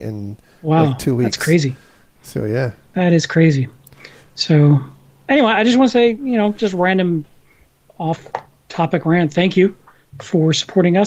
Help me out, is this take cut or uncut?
uncut